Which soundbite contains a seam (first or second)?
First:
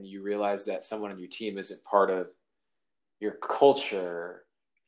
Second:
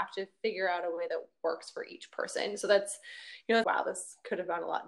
second